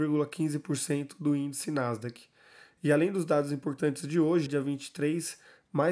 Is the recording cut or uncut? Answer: cut